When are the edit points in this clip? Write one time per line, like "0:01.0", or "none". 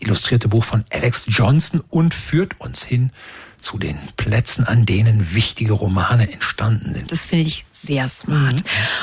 0:07.1